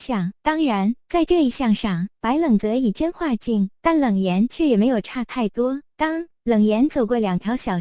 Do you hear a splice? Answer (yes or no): no